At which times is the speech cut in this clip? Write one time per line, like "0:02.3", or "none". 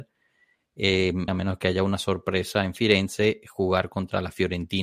0:01.3